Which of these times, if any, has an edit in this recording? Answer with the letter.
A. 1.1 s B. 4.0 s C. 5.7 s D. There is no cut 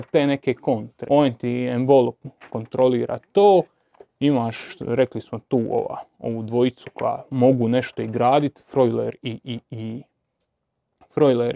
A